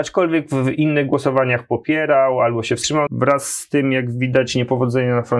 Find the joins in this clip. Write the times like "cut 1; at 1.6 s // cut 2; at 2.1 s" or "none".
cut 1; at 3.1 s